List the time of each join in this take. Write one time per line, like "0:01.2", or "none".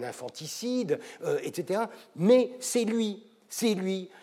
none

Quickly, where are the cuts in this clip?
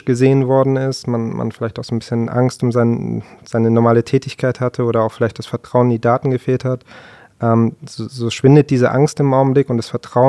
none

